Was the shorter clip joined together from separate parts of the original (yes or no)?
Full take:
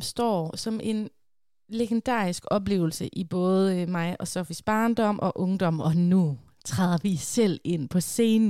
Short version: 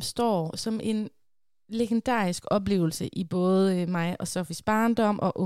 no